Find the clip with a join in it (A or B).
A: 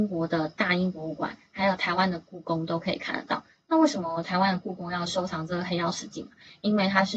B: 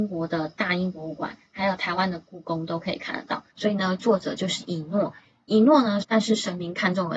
B